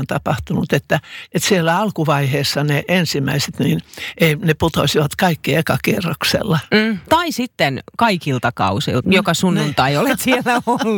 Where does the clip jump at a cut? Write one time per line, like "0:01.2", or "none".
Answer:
0:07.1
0:09.0